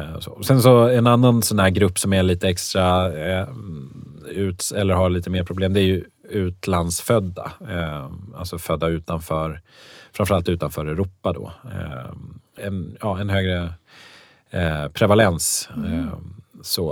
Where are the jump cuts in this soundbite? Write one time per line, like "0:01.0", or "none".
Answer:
0:12.6